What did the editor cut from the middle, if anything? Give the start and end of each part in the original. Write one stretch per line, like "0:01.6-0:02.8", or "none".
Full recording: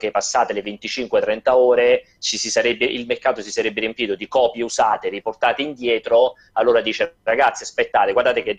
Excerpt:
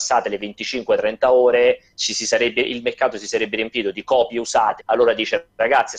0:05.0-0:06.5